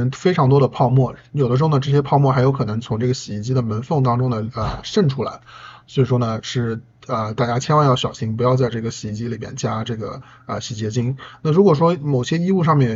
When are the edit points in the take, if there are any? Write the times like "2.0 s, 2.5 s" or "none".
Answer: none